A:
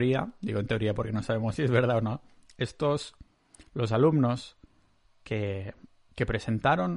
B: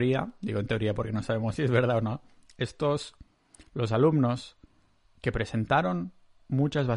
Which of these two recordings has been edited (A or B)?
B